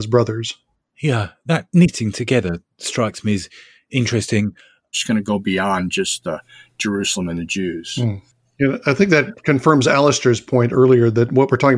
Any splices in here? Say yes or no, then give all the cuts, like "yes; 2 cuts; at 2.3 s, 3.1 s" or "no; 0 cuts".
yes; 1 cut; at 4.9 s